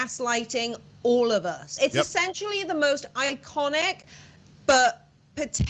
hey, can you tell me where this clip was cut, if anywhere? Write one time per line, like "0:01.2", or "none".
0:01.8

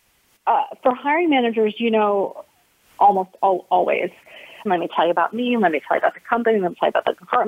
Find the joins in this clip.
0:02.7
0:04.7

